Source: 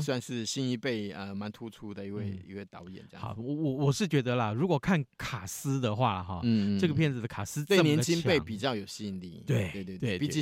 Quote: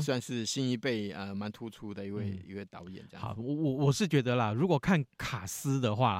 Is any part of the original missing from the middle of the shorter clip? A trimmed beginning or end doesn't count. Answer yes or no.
no